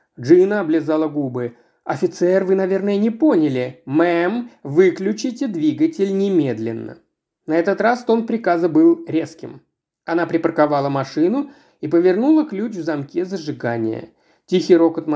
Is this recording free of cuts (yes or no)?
yes